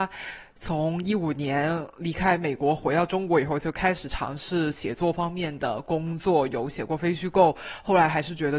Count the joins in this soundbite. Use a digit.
0